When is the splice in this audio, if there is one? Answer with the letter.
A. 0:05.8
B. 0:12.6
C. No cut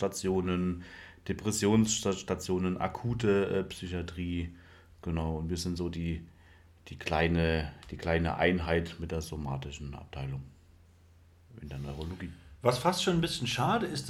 C